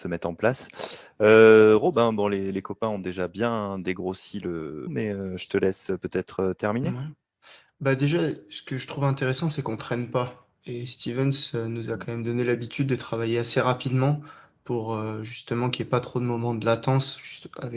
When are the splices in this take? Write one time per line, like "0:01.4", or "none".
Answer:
0:04.9

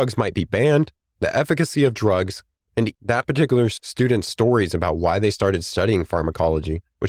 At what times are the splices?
0:02.9

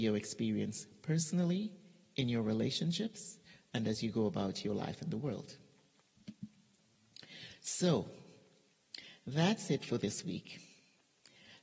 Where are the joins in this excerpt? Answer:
none

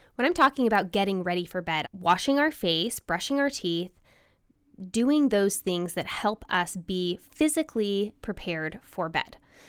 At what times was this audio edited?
0:01.8

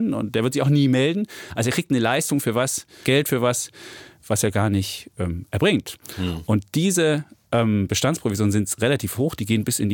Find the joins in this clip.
0:03.0

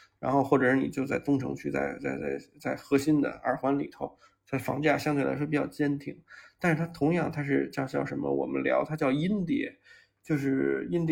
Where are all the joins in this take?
none

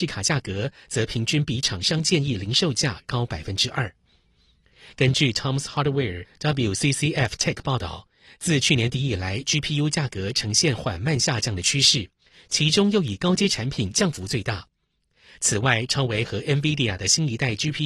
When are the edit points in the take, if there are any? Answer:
none

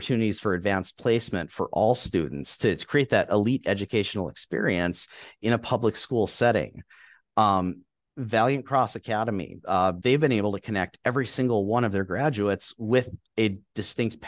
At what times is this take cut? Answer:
0:07.2
0:10.0

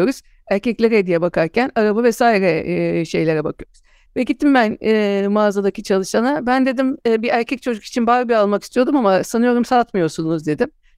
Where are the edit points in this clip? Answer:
0:04.1

